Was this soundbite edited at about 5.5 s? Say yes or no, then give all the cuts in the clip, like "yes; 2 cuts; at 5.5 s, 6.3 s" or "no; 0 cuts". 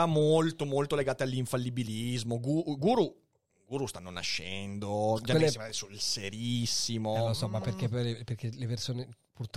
no; 0 cuts